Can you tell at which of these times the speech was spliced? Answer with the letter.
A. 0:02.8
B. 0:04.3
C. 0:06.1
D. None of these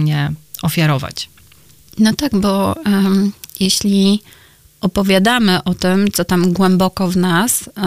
D